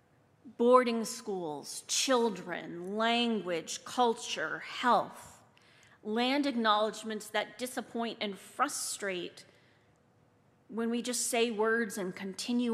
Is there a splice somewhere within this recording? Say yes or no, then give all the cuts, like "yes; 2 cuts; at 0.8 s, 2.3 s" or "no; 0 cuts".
no; 0 cuts